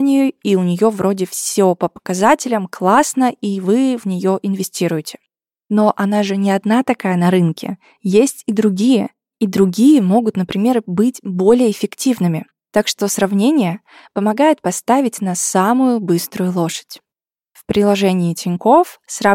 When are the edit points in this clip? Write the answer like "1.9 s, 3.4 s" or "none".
none